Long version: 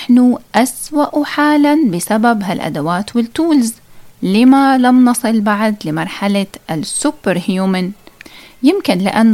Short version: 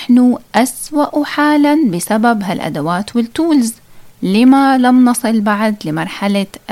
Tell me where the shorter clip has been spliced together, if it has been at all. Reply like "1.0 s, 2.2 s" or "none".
none